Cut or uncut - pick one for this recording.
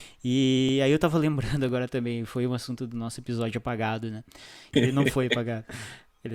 cut